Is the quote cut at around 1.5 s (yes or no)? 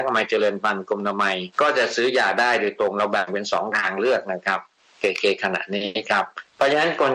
yes